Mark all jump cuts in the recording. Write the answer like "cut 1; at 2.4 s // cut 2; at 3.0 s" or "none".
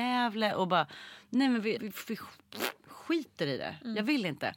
cut 1; at 1.8 s